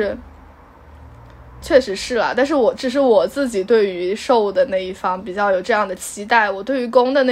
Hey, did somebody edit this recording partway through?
yes; 1 cut; at 1.6 s

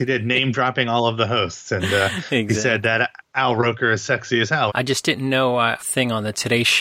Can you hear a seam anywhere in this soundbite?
yes; 2 cuts; at 4.7 s, 5.8 s

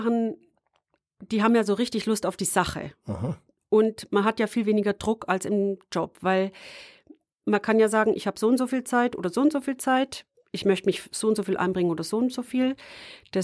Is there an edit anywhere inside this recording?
no; 0 cuts

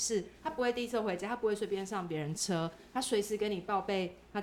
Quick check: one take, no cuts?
yes; 0 cuts

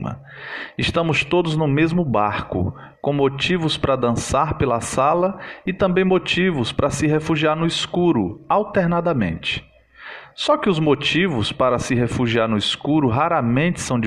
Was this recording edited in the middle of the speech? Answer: no; 0 cuts

